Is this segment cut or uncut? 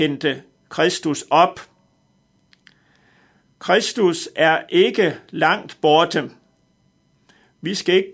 uncut